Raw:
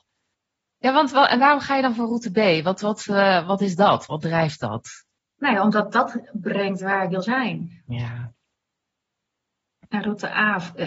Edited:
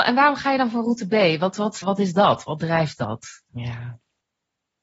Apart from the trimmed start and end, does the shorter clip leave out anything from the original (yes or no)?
yes